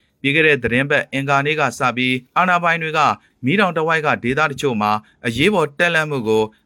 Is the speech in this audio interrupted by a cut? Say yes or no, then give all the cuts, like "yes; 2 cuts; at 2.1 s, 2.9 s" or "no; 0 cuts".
yes; 1 cut; at 2.3 s